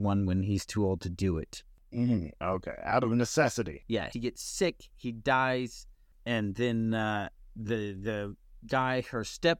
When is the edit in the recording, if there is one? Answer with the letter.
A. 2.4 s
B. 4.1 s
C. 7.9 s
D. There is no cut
B